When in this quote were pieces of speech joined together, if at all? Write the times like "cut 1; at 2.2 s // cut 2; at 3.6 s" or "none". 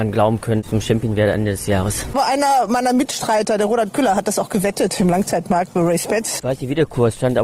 cut 1; at 6.4 s